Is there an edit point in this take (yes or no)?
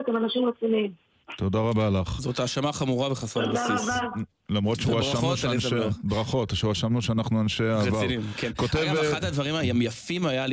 no